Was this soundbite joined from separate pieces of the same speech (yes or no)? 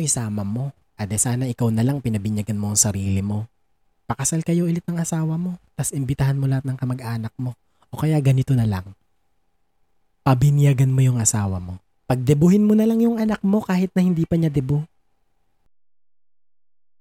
no